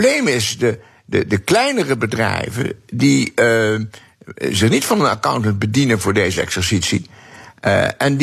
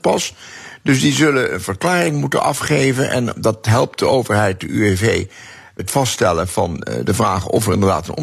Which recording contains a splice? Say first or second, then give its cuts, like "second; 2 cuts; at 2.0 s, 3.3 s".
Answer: second; 1 cut; at 5.8 s